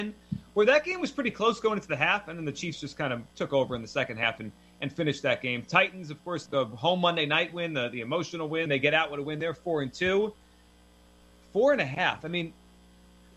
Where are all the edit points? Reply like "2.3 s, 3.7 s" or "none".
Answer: 3.3 s, 6.5 s, 8.7 s